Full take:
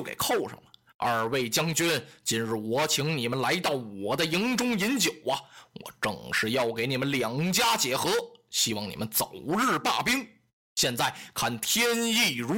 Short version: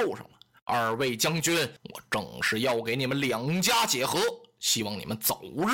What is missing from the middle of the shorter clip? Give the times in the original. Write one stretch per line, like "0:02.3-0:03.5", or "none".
0:02.1-0:05.7